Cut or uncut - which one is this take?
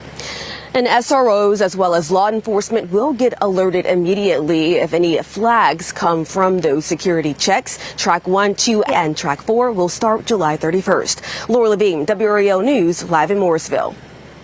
cut